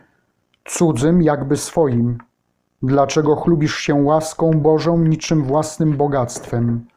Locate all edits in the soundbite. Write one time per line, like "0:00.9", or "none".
none